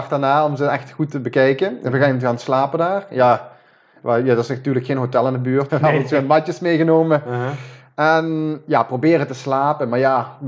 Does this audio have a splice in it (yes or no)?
yes